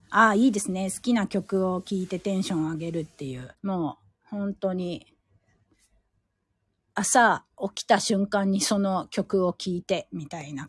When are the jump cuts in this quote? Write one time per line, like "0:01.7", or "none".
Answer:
0:03.5